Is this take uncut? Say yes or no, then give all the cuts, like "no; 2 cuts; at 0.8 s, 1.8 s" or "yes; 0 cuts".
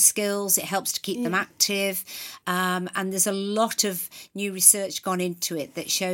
yes; 0 cuts